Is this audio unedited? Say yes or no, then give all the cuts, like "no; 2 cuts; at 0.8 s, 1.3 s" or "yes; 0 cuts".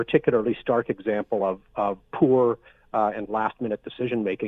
yes; 0 cuts